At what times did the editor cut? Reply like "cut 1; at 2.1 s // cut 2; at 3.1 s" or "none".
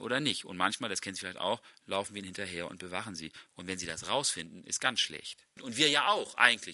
cut 1; at 5.6 s